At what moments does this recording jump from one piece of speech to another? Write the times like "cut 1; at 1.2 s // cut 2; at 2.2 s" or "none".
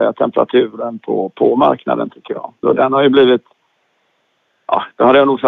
cut 1; at 2.6 s